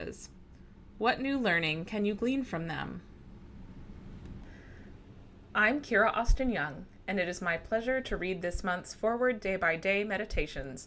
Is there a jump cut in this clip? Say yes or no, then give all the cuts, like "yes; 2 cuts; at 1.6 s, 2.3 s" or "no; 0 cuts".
no; 0 cuts